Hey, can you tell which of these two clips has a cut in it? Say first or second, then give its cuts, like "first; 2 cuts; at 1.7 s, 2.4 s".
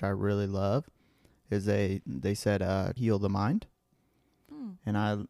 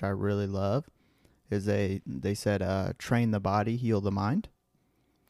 first; 1 cut; at 3.0 s